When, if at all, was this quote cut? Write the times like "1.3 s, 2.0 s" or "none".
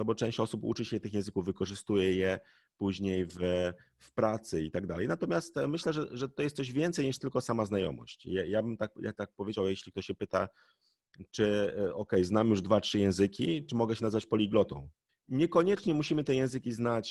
15.1 s